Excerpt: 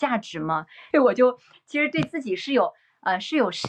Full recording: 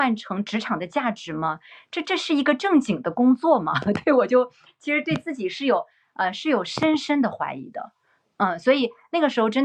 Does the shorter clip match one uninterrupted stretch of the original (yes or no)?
no